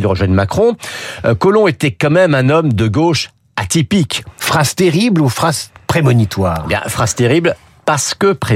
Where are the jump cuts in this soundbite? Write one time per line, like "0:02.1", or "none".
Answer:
0:04.4